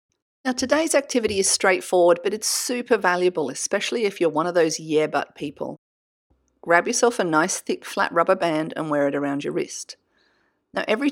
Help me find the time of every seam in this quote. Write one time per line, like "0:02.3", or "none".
none